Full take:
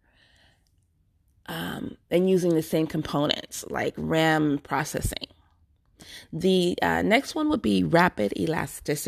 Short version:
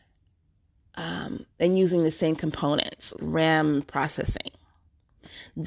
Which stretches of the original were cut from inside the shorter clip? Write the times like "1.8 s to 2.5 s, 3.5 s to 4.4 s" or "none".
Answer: 3.7 s to 3.9 s